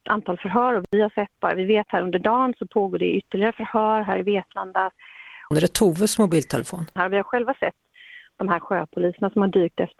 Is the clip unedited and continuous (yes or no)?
no